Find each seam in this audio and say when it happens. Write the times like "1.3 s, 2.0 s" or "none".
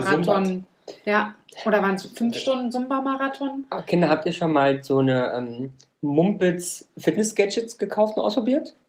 none